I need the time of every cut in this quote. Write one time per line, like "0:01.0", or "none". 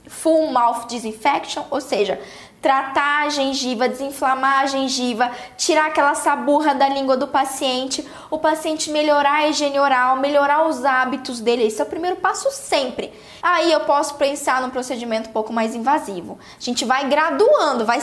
0:13.4